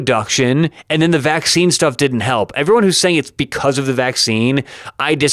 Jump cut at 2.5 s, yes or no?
no